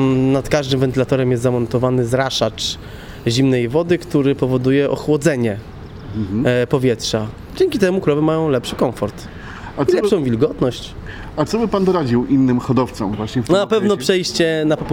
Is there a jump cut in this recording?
no; 0 cuts

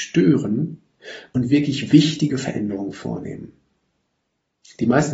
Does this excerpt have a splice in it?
no; 0 cuts

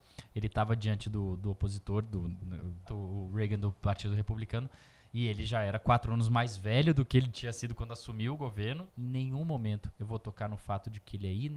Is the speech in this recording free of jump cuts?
no; 2 cuts; at 2.9 s, 8.9 s

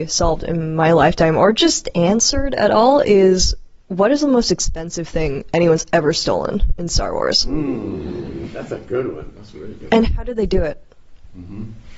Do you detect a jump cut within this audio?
no; 0 cuts

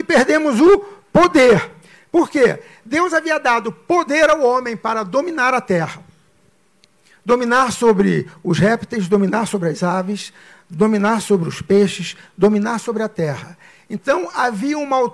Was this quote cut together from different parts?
no; 0 cuts

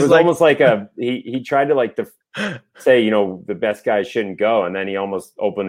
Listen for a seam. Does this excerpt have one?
no; 0 cuts

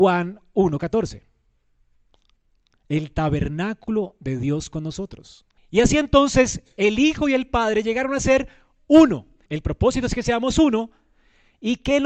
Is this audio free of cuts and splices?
no; 2 cuts; at 5.6 s, 9.5 s

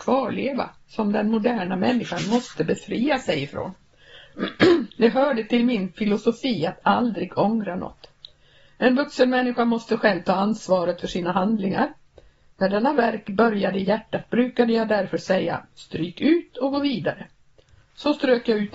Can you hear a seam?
no; 0 cuts

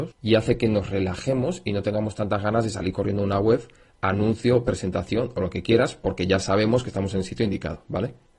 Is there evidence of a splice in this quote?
no; 0 cuts

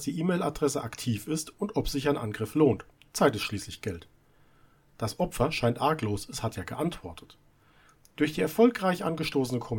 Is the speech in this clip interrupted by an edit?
no; 0 cuts

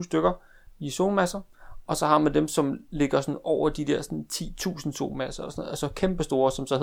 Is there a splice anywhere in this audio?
no; 0 cuts

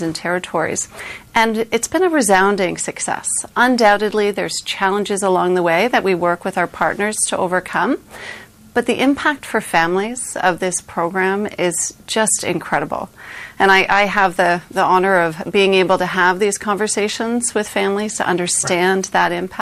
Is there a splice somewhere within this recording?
no; 0 cuts

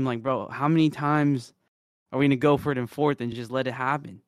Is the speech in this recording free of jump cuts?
yes; 0 cuts

